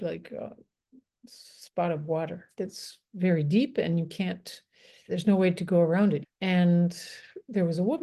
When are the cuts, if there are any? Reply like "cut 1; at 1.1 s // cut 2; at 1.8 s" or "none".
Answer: cut 1; at 5.1 s // cut 2; at 6.2 s